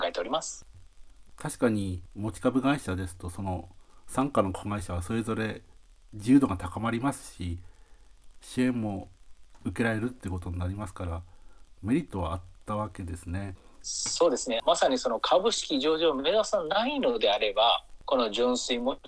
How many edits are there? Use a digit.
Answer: 0